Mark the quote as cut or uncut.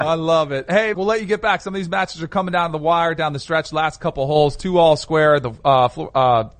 cut